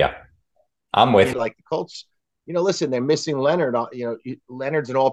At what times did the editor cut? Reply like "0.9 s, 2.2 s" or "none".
1.3 s